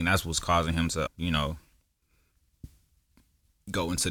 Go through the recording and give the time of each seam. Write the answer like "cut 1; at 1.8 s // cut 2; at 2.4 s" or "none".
cut 1; at 1.1 s